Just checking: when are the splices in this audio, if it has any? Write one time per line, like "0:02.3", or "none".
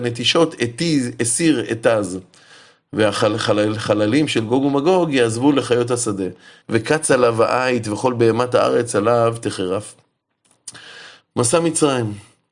0:06.6
0:11.2